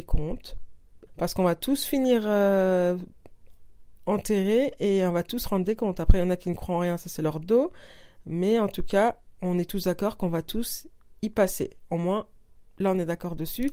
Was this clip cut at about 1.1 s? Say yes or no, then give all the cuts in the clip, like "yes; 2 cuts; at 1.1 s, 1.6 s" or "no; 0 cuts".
yes; 1 cut; at 1.1 s